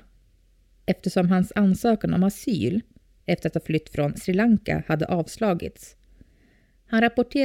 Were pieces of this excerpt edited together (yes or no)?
no